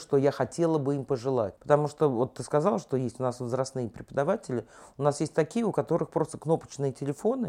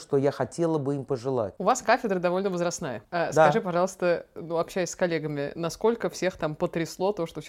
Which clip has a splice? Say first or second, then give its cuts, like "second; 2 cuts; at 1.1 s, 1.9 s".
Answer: first; 1 cut; at 1.6 s